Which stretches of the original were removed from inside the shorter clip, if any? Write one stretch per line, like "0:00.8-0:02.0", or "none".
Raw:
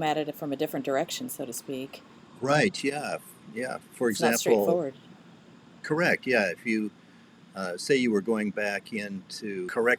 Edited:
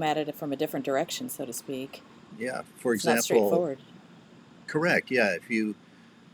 0:02.3-0:03.5